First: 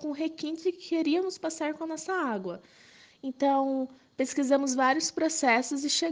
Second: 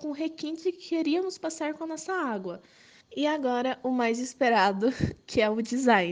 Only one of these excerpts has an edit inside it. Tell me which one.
second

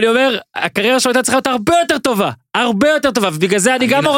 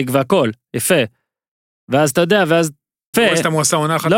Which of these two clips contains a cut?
second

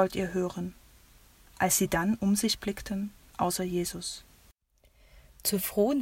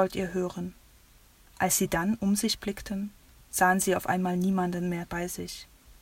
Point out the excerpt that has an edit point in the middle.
first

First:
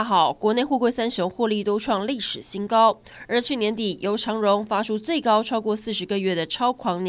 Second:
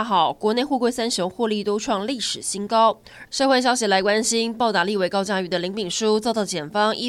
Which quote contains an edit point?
second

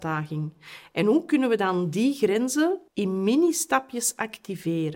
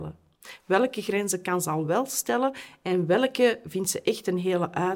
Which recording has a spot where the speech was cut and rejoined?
first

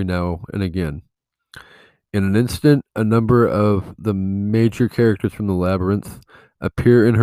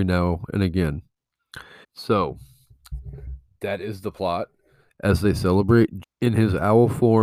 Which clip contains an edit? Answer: second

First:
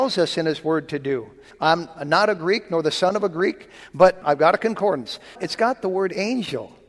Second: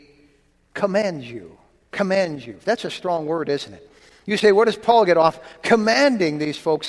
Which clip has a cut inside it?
first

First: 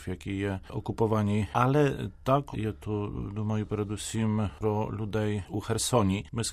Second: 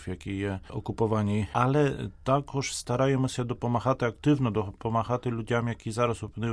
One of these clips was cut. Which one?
first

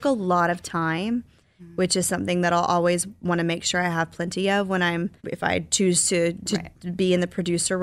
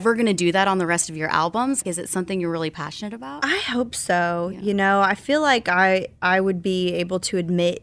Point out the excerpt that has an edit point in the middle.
first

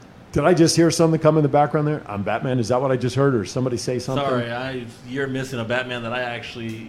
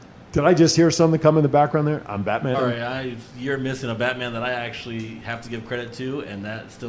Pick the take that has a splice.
second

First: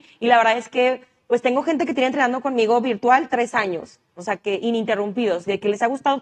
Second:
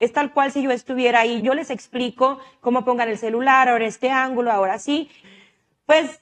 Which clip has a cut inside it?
second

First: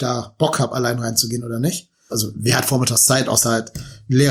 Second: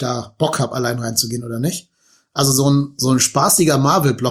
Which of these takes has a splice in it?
first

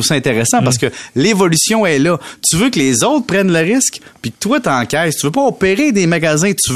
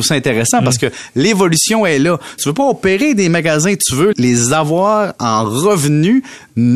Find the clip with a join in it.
second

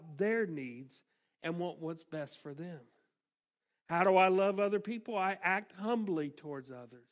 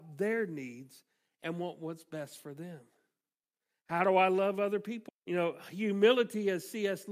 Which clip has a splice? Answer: second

